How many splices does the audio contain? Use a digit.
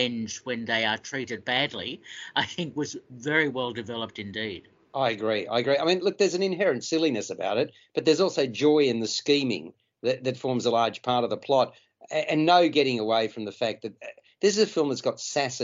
0